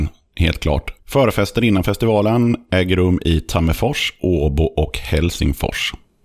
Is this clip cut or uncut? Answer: cut